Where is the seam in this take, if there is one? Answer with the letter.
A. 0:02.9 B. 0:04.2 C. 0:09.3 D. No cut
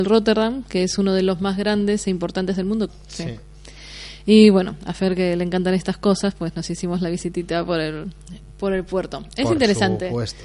A